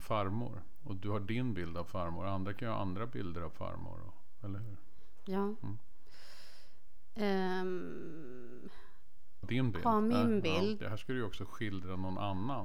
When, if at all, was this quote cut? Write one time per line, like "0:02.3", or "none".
0:09.4
0:10.8